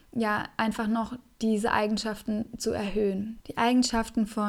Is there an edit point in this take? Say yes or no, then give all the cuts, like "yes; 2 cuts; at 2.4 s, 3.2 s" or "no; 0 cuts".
yes; 1 cut; at 3.4 s